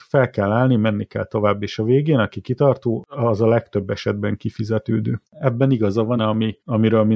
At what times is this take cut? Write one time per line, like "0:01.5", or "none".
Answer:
0:06.2